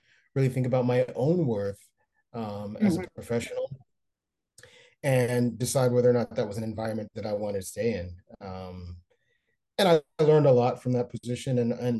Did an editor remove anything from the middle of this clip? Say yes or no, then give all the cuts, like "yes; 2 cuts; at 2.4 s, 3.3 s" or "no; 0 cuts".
no; 0 cuts